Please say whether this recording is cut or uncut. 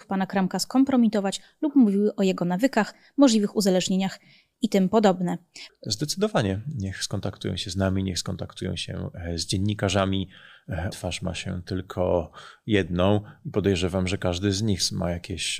cut